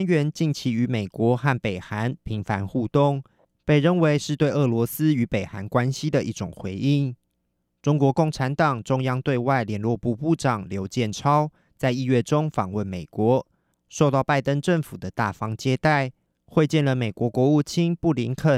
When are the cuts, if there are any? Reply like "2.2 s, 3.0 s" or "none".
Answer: none